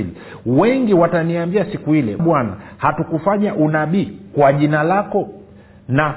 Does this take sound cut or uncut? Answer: cut